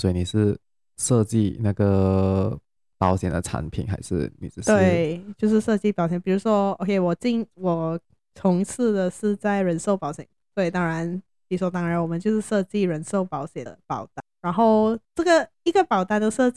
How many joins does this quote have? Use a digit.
1